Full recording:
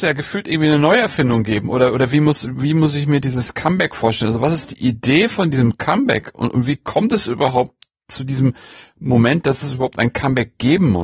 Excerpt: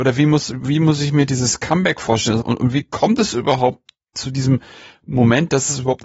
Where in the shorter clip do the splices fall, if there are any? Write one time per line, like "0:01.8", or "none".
0:02.4